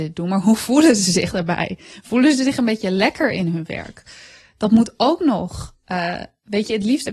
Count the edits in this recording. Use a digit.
0